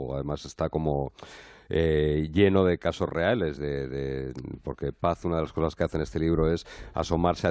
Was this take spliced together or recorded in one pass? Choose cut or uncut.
uncut